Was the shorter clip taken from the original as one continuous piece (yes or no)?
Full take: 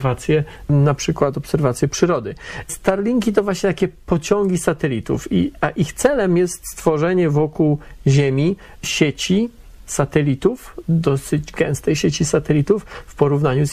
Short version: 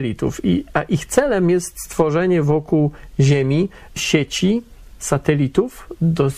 yes